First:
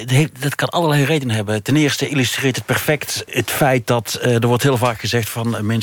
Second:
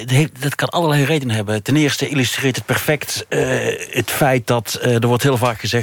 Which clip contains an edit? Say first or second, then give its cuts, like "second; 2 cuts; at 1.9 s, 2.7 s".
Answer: first; 1 cut; at 3.3 s